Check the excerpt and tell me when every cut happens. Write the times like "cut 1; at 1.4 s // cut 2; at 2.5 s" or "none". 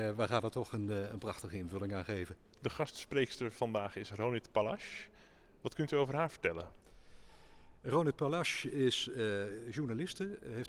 none

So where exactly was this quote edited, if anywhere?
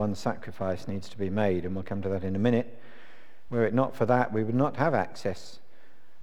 cut 1; at 3.5 s

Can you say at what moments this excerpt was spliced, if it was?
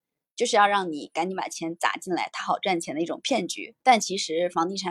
cut 1; at 3.8 s

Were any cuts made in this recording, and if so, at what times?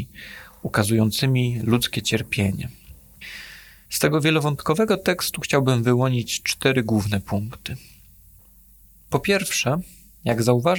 cut 1; at 3.8 s

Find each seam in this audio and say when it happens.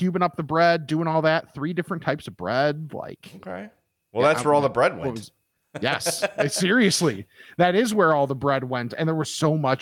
none

